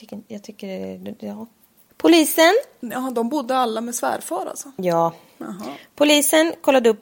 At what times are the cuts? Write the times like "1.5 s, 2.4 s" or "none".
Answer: 1.9 s